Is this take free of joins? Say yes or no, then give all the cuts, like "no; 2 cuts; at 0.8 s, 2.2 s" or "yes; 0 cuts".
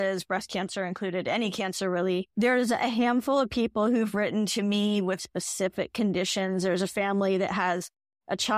no; 1 cut; at 5.2 s